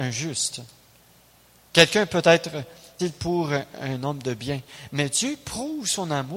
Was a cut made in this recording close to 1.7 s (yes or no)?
no